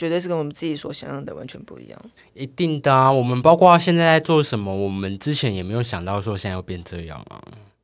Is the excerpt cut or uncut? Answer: uncut